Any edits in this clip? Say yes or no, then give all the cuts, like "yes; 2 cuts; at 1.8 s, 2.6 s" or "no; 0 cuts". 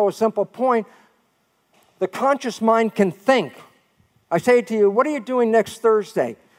no; 0 cuts